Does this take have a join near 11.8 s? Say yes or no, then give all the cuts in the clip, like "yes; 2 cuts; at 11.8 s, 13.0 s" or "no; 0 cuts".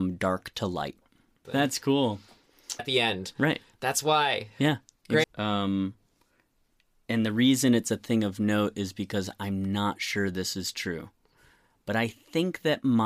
no; 3 cuts; at 1.4 s, 2.8 s, 5.2 s